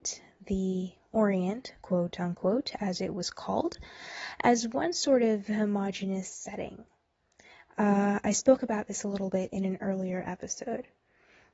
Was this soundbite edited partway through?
no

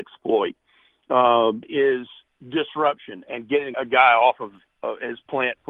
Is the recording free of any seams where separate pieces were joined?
no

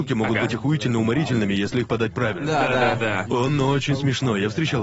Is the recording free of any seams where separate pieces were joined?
yes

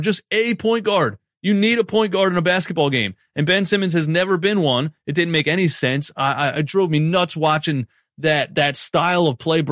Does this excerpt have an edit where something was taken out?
no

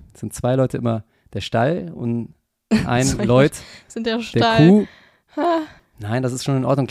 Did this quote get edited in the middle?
yes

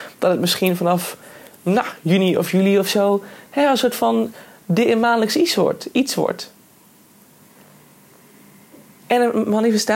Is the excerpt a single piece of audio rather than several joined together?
yes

